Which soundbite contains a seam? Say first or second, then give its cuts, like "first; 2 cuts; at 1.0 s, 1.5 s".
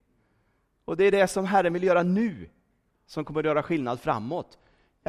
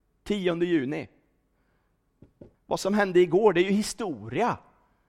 second; 1 cut; at 2.5 s